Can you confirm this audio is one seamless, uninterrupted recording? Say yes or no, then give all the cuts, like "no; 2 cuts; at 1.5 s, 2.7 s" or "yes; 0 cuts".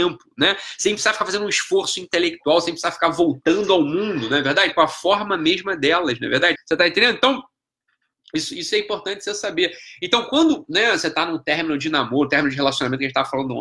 no; 2 cuts; at 4.7 s, 6.6 s